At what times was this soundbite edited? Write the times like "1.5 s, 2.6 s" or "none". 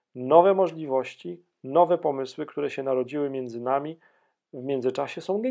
none

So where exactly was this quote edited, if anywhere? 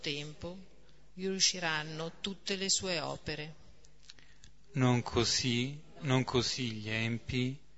1.1 s

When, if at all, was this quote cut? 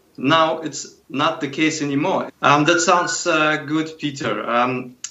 2.3 s

